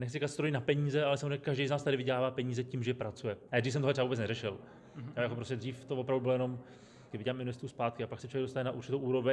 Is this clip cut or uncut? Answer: cut